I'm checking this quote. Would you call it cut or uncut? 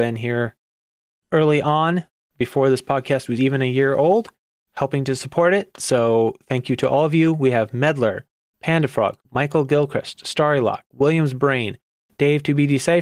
uncut